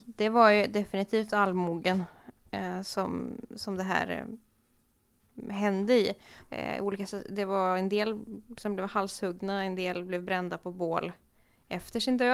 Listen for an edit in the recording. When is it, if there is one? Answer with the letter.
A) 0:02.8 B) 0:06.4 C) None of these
B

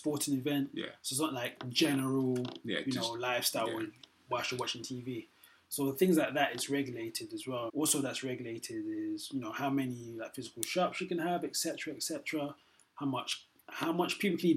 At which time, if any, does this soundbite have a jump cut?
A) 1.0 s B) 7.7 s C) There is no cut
B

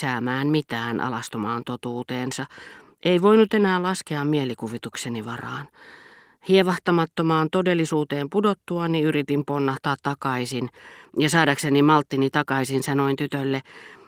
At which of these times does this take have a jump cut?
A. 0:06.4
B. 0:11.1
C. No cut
B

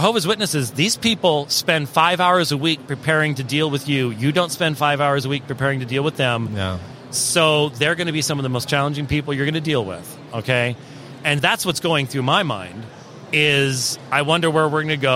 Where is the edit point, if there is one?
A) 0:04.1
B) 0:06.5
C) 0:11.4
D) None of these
C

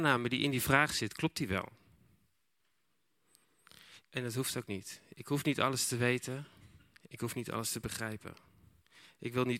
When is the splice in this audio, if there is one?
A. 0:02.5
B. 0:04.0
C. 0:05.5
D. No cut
B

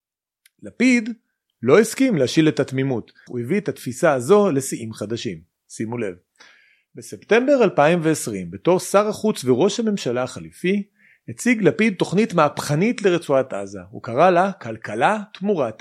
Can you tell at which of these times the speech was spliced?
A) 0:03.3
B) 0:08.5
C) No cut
A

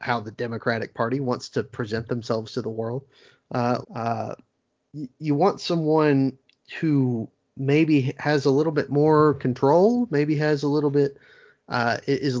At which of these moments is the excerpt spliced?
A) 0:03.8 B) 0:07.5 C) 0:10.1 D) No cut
A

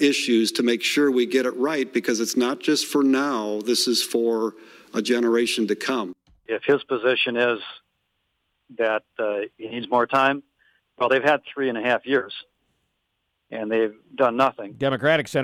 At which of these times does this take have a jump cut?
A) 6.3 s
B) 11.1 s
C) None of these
C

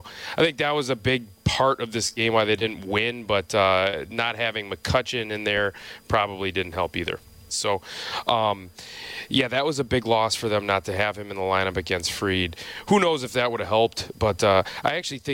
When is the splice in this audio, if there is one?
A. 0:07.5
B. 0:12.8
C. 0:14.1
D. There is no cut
A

